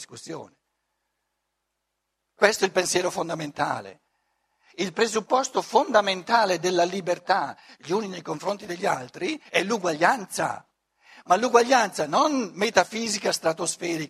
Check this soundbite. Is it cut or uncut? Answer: cut